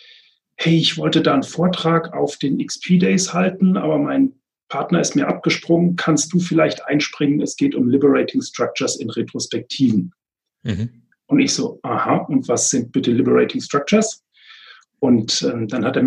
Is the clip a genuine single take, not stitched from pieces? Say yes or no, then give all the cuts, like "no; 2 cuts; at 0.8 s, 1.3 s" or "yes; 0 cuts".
yes; 0 cuts